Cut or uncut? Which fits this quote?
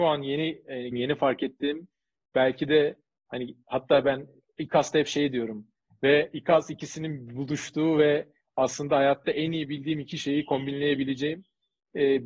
cut